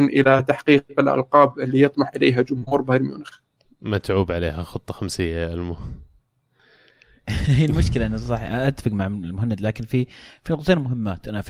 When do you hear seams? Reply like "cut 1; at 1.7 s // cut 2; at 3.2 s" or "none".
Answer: none